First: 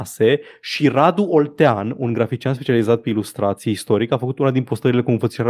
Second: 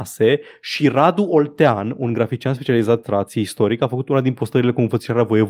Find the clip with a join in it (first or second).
second